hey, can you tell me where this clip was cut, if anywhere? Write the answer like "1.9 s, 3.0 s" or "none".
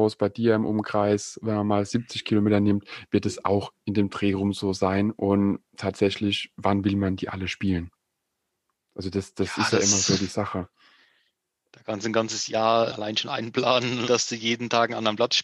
12.9 s, 14.1 s